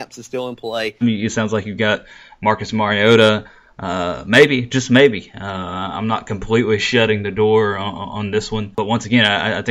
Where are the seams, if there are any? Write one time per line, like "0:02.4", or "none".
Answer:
0:01.0